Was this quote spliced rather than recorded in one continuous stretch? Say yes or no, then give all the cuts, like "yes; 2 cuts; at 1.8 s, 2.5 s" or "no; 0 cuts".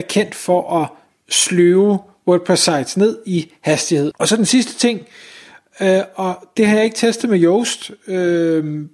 yes; 1 cut; at 4.1 s